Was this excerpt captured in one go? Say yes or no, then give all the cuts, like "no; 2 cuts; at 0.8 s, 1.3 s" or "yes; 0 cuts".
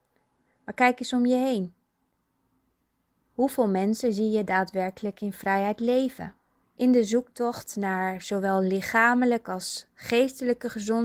no; 1 cut; at 6.6 s